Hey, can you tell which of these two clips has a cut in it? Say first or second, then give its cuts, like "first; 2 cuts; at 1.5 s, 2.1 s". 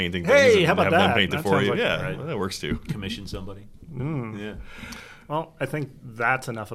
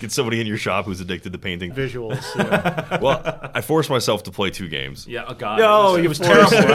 second; 1 cut; at 1.7 s